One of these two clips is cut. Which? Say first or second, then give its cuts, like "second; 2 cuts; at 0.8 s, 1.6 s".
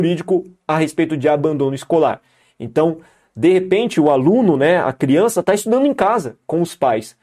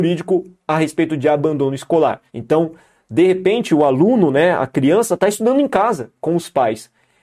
second; 1 cut; at 2.3 s